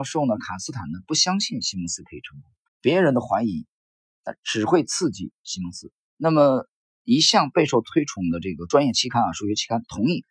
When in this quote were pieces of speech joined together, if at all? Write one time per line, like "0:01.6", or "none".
0:02.7
0:06.1